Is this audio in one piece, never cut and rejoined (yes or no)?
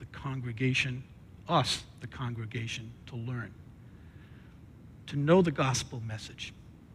yes